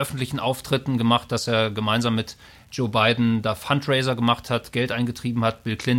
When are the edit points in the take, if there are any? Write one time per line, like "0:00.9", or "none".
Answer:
none